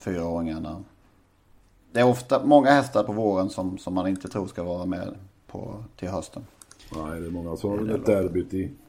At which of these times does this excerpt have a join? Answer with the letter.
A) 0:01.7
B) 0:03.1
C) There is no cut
B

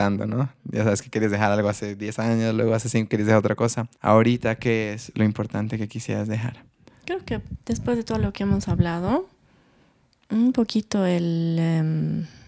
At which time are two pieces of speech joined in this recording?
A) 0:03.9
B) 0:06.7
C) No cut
A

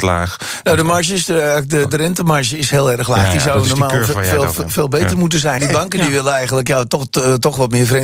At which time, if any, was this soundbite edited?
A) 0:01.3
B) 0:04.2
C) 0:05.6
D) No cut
C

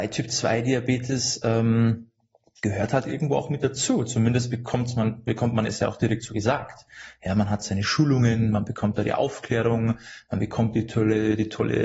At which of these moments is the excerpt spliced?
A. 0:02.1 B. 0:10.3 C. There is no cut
C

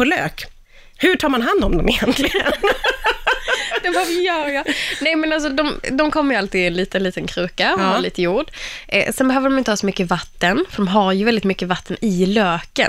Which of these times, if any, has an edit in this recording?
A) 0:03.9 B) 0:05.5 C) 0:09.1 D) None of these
D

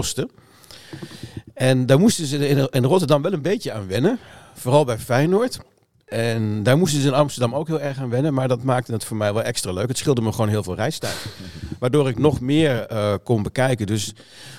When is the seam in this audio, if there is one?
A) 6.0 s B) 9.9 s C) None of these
A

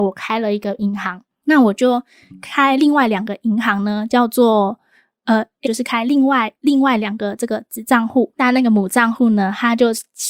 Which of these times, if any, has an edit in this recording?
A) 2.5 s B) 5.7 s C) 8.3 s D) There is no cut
B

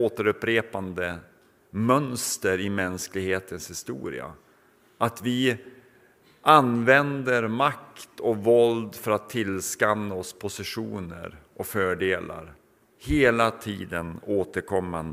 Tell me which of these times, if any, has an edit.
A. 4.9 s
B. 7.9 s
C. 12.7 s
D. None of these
D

